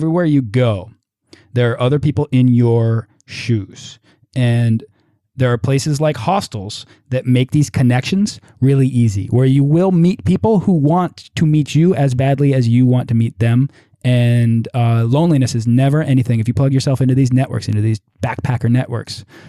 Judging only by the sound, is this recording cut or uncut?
uncut